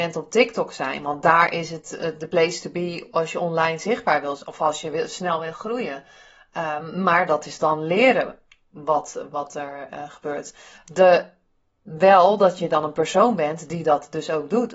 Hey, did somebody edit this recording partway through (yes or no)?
no